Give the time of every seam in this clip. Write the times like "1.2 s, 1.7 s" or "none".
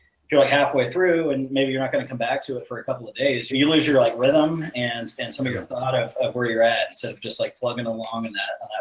3.5 s